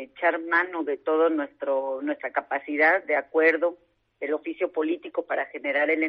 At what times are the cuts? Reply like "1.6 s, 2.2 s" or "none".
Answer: none